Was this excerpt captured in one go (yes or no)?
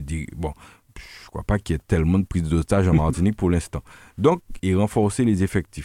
no